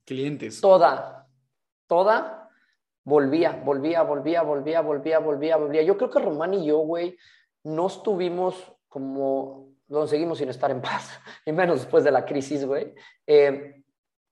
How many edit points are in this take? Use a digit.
1